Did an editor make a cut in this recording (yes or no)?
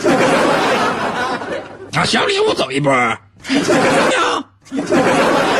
yes